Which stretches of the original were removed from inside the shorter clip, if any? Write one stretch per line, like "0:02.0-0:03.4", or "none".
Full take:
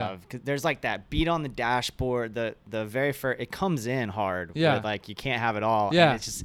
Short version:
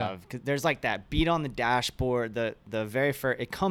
none

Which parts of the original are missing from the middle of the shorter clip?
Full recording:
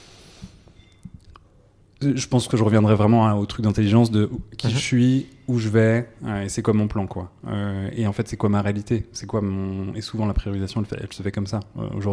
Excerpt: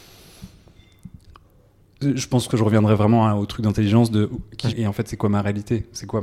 0:04.7-0:07.9

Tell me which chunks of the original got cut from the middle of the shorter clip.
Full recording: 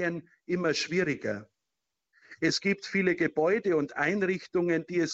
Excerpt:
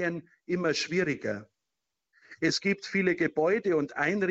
none

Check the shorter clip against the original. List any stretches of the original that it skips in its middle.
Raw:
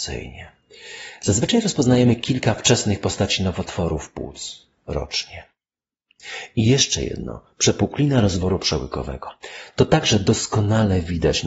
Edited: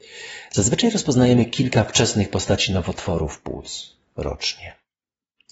none

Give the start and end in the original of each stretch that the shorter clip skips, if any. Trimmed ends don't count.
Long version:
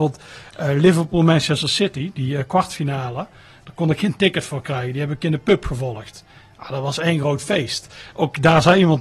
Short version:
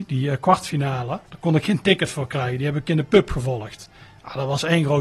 0:03.3-0:03.6

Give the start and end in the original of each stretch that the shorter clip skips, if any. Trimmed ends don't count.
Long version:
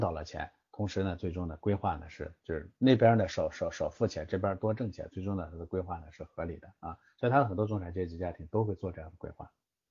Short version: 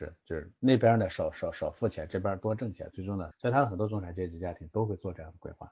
0:05.5-0:07.1

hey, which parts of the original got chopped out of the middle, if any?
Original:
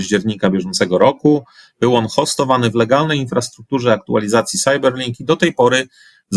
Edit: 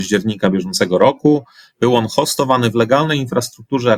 none

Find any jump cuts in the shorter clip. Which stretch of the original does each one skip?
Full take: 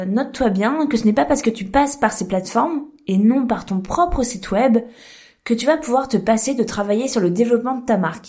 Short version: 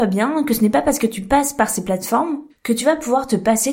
0:02.9-0:05.3

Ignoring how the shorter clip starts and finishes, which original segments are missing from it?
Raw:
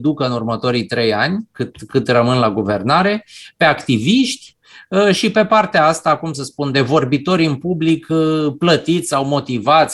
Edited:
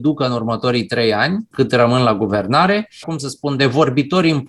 0:01.5-0:01.9
0:03.4-0:06.2

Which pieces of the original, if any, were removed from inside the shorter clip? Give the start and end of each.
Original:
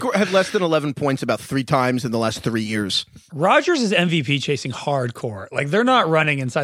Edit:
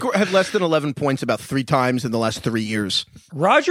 none

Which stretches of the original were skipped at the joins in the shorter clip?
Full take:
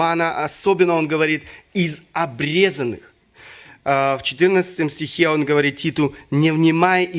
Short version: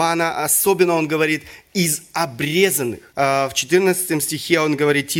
0:03.1-0:03.8

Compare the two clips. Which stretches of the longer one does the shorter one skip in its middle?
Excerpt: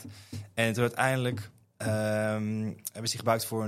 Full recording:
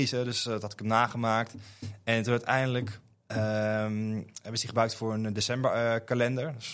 none

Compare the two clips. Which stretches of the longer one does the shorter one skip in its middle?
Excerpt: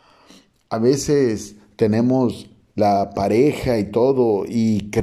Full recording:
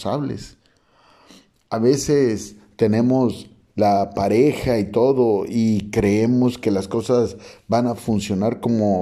none

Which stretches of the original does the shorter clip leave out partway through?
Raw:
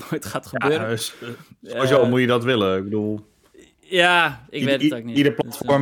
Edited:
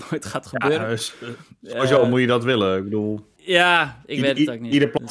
0:03.4-0:03.8

